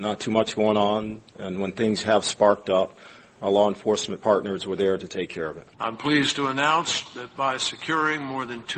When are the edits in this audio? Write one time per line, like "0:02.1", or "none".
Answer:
0:03.4
0:05.7